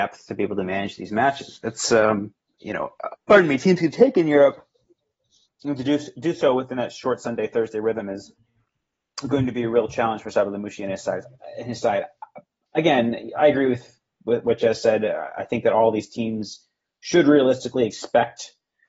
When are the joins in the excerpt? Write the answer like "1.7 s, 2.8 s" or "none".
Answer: 3.1 s